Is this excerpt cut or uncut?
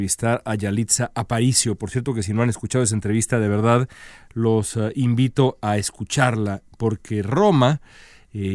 uncut